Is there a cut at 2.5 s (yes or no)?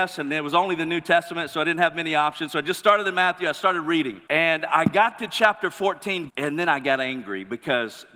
no